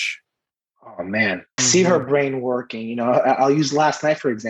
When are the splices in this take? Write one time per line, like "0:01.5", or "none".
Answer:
0:01.6